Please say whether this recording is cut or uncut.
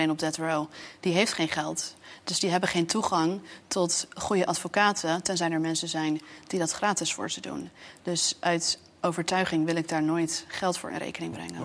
uncut